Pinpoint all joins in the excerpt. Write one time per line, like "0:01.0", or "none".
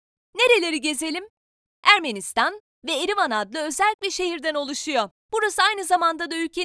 0:02.8
0:05.2